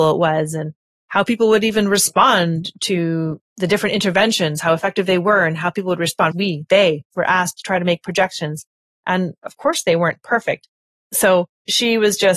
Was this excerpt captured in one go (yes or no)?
no